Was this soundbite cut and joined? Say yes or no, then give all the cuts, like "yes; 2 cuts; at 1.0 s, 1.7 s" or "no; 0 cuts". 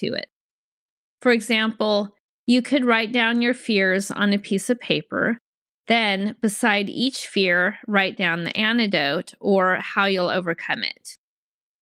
no; 0 cuts